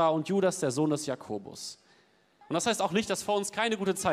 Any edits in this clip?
yes; 1 cut; at 2.4 s

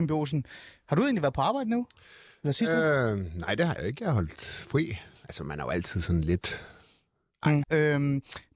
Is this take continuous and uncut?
no; 1 cut; at 7.6 s

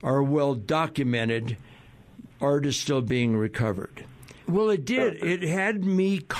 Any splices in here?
yes; 2 cuts; at 2.3 s, 4.4 s

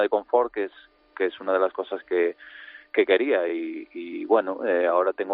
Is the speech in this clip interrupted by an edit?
no; 0 cuts

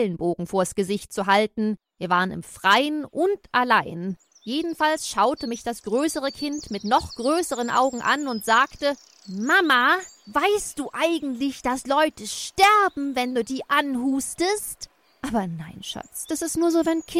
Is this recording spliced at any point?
no; 0 cuts

